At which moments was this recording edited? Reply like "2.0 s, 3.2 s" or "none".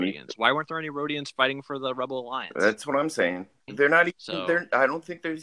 3.7 s